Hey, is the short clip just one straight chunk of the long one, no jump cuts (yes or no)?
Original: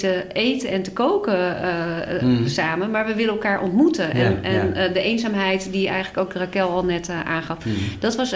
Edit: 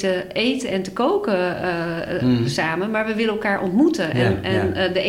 yes